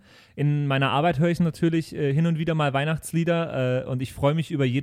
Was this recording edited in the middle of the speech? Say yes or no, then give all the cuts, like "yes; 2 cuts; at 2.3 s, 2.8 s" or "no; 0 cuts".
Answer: no; 0 cuts